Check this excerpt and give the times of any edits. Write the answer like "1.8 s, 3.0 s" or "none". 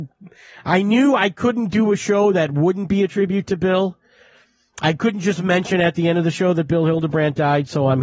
none